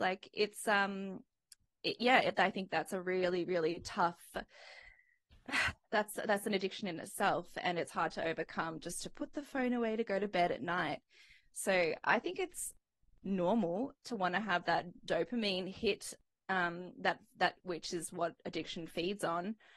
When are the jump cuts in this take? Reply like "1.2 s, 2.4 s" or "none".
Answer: none